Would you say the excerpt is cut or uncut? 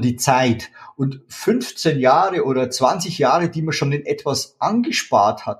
uncut